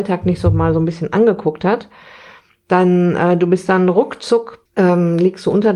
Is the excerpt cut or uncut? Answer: cut